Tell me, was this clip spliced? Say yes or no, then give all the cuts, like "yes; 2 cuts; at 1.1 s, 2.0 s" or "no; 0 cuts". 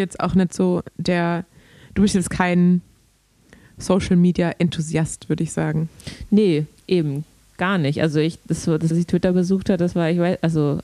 yes; 1 cut; at 8.9 s